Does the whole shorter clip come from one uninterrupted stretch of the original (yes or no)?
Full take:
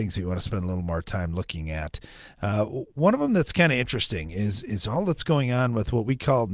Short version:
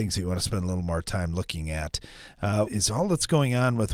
no